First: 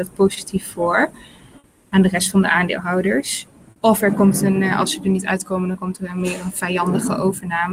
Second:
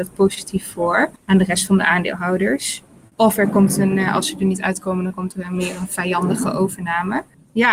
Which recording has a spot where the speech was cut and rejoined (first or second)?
second